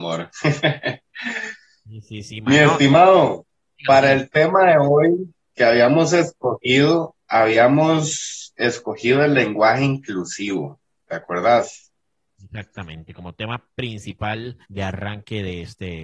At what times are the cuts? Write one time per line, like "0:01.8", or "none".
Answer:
0:14.6